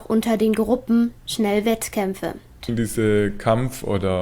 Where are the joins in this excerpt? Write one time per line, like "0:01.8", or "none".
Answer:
0:02.6